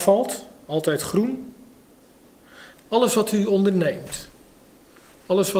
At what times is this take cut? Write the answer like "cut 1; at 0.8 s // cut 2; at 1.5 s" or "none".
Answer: cut 1; at 2.7 s

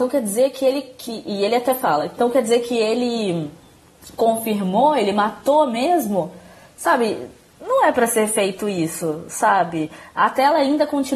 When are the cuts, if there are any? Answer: none

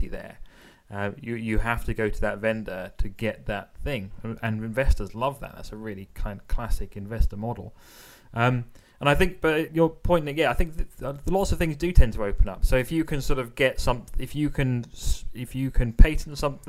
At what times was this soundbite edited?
cut 1; at 9.7 s // cut 2; at 12.6 s

